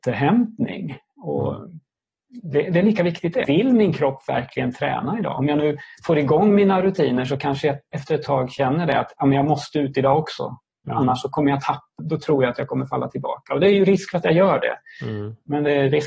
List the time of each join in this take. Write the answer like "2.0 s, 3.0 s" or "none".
3.4 s, 12.0 s